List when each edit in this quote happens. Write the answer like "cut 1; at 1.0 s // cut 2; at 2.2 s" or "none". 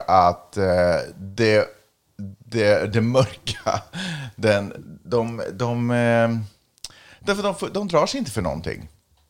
none